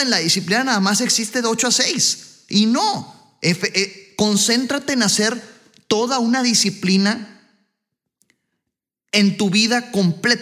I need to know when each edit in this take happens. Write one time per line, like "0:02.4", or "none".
none